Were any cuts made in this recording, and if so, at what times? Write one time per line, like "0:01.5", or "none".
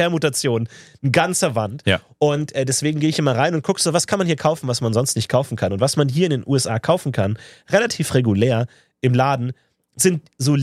none